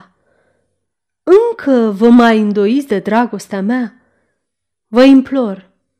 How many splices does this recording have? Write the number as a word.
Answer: one